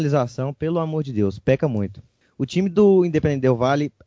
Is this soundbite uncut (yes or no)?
yes